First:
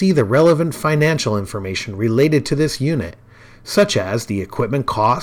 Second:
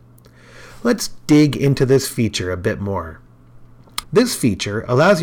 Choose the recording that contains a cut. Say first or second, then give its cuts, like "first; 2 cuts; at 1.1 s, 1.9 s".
second; 1 cut; at 4.0 s